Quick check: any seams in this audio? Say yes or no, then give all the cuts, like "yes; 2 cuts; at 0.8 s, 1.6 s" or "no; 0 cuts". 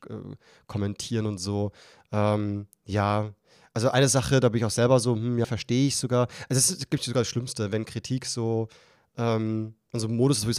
yes; 1 cut; at 5.4 s